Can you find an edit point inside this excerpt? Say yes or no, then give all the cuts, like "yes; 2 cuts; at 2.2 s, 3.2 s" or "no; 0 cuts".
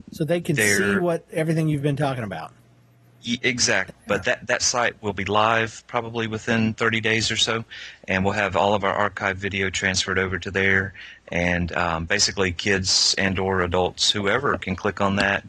yes; 1 cut; at 3.9 s